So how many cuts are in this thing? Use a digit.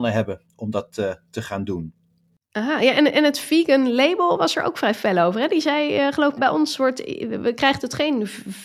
1